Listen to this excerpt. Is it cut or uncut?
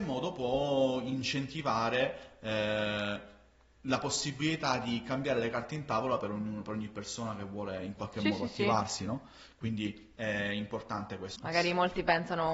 cut